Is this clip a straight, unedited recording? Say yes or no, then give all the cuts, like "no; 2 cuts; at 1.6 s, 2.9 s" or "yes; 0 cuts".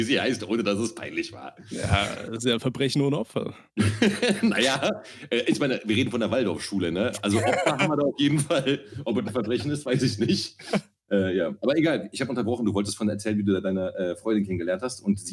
yes; 0 cuts